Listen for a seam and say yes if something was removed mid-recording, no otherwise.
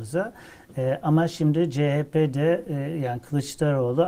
no